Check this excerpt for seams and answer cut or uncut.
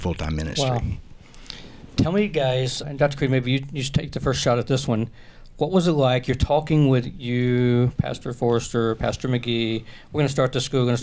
cut